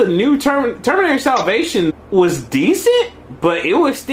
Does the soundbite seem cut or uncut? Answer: cut